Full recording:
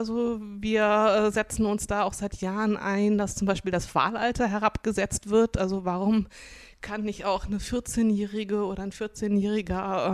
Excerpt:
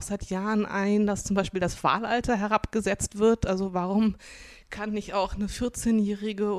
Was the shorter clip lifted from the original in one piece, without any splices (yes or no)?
yes